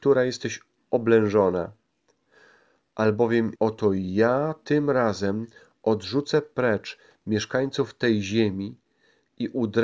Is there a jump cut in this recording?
yes; 1 cut; at 3.6 s

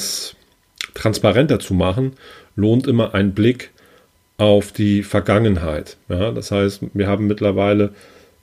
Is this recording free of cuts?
yes; 0 cuts

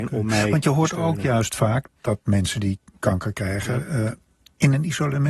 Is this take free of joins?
no; 1 cut; at 1.9 s

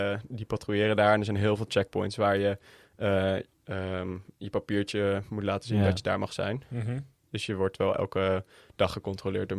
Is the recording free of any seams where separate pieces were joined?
no; 1 cut; at 3.5 s

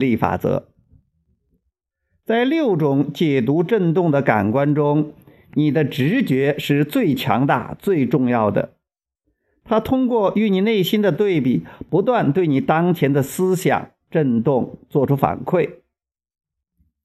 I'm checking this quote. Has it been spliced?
no; 0 cuts

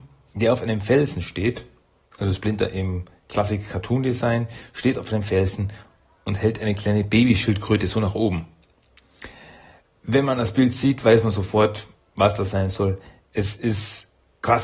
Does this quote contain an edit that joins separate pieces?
no; 0 cuts

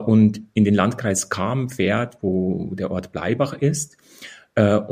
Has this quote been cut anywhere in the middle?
no; 0 cuts

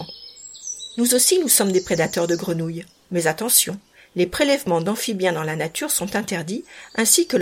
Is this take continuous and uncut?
yes; 0 cuts

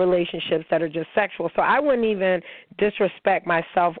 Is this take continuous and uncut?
yes; 0 cuts

